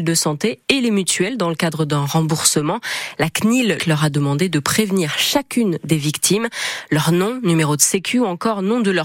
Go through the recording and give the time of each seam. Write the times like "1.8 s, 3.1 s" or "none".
3.8 s